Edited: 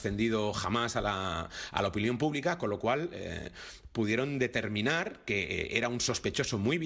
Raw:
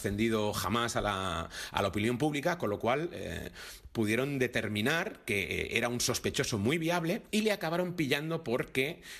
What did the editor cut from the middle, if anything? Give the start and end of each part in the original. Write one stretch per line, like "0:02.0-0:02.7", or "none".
none